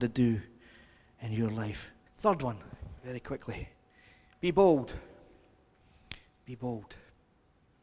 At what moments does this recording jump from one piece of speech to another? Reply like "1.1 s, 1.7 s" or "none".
2.1 s